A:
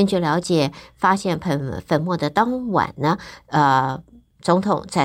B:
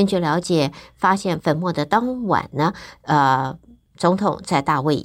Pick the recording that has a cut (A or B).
B